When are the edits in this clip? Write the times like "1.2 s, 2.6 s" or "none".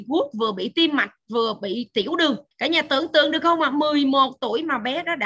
2.5 s

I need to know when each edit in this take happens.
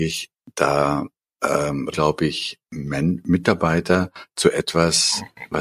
1.9 s

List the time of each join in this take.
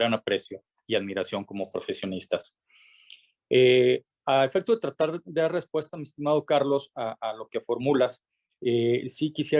none

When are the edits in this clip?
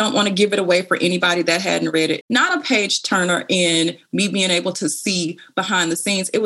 2.2 s

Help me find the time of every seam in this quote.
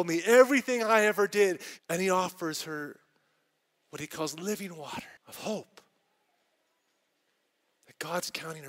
1.8 s, 5.2 s

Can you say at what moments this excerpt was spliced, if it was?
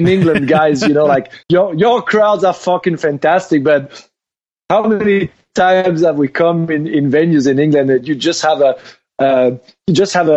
1.4 s

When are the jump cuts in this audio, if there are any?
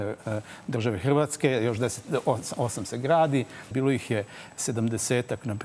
3.7 s

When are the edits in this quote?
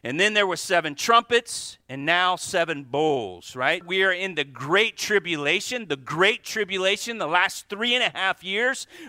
3.8 s

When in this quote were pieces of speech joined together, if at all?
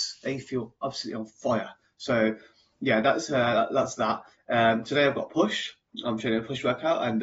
none

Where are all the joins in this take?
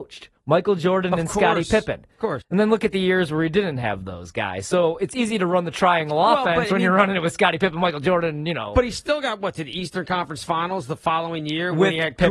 2.4 s

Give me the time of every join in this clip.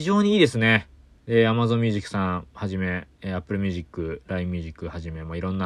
1.2 s

